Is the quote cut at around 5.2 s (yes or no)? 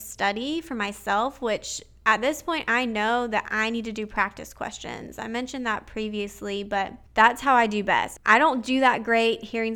no